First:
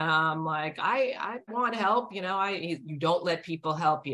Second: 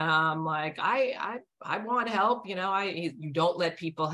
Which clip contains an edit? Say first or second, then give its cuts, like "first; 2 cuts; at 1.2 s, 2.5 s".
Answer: first; 1 cut; at 1.5 s